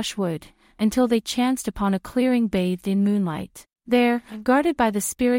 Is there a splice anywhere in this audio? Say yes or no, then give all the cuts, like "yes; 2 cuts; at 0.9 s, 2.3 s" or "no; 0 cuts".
yes; 1 cut; at 3.7 s